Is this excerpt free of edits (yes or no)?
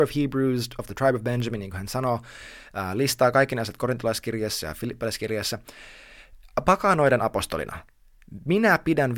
yes